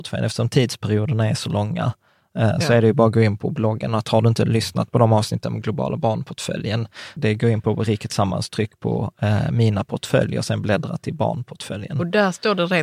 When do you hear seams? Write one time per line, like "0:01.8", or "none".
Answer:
0:07.2